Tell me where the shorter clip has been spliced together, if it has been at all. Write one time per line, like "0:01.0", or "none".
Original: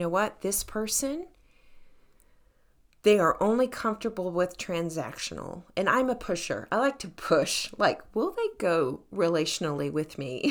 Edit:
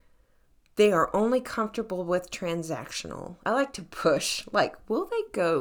0:03.4